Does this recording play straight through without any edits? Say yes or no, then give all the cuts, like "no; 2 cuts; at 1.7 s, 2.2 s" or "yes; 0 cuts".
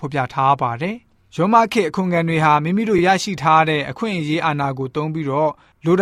yes; 0 cuts